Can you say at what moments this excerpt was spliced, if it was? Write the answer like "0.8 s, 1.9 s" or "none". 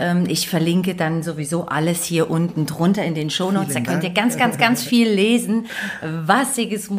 none